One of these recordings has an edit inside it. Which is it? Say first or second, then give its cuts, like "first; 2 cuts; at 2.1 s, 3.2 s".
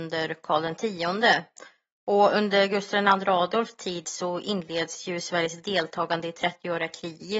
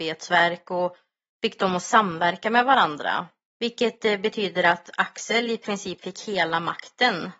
second; 1 cut; at 3.5 s